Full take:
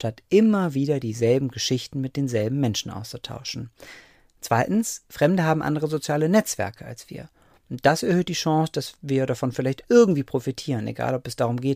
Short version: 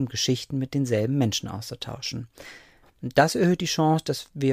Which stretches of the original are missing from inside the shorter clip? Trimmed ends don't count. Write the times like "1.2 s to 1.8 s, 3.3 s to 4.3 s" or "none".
4.2 s to 7.5 s